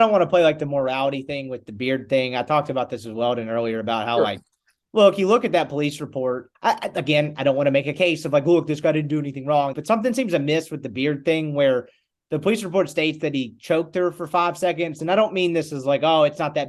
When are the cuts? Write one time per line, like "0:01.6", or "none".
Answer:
0:06.5
0:09.7
0:15.0